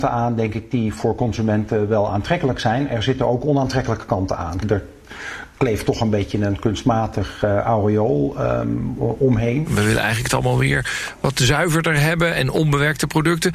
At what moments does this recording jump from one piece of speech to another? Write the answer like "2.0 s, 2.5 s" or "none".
4.6 s, 9.7 s